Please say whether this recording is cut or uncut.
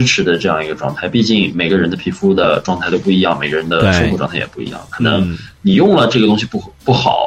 uncut